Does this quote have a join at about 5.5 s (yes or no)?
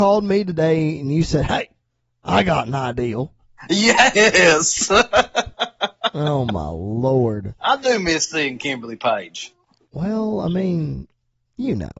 yes